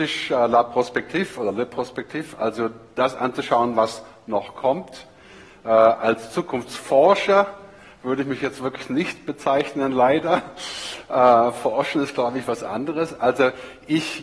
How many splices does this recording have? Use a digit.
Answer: 0